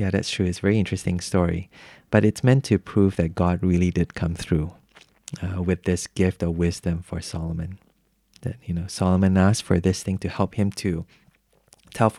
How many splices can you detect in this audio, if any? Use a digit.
0